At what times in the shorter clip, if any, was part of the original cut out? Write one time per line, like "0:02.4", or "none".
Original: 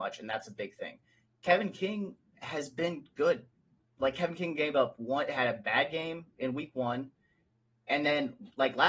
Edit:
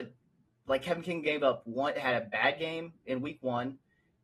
none